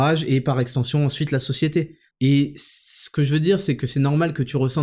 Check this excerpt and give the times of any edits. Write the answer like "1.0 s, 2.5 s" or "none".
2.1 s